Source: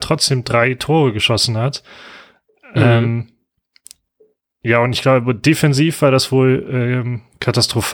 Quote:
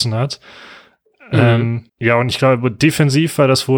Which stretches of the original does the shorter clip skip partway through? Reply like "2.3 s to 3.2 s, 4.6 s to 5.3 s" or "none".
3.3 s to 4.5 s